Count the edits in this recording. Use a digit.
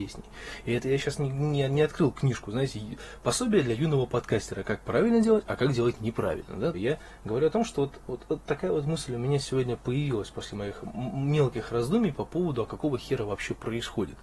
1